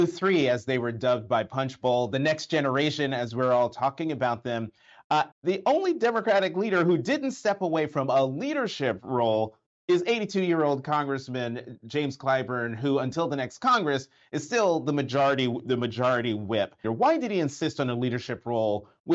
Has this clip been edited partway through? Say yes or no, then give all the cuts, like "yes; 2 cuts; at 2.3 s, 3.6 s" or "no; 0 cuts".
yes; 2 cuts; at 5.3 s, 16.8 s